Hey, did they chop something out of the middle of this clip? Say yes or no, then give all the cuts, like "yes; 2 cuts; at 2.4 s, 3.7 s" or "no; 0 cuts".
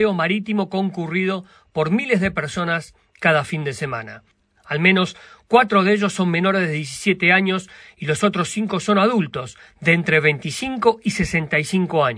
yes; 1 cut; at 4.6 s